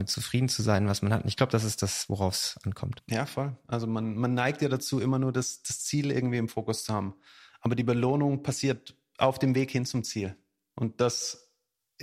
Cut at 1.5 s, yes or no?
no